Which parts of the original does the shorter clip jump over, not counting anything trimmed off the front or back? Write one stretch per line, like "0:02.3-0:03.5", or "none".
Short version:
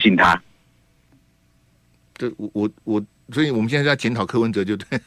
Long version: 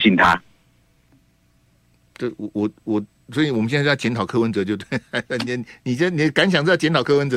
none